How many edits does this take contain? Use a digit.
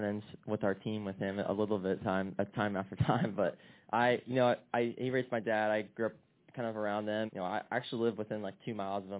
1